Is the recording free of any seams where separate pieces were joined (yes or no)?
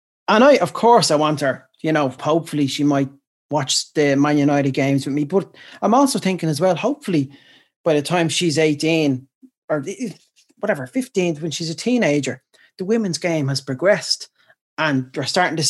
no